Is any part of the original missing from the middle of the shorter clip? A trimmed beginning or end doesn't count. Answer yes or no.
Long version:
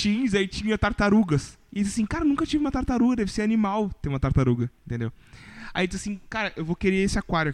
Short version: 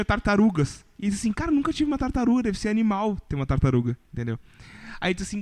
no